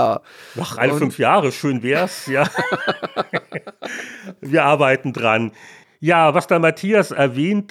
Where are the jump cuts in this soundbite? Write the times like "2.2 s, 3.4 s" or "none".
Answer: none